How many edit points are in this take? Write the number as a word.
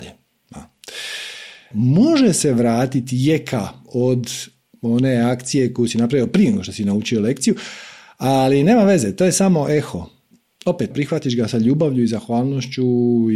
two